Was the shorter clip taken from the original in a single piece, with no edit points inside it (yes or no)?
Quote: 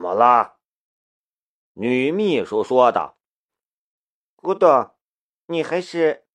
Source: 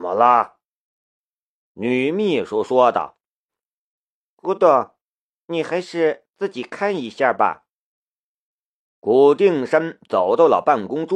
yes